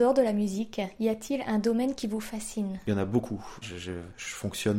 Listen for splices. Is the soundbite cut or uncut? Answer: cut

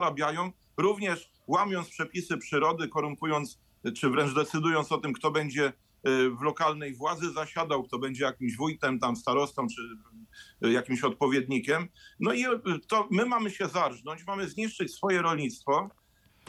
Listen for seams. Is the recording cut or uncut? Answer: uncut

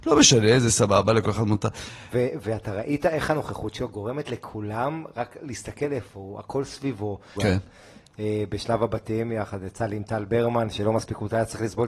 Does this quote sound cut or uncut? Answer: cut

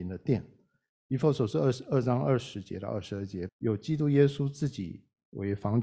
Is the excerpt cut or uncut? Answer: cut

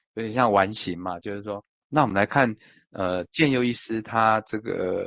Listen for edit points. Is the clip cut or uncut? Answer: cut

